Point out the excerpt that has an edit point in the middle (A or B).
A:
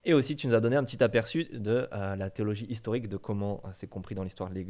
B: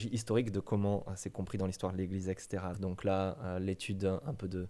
B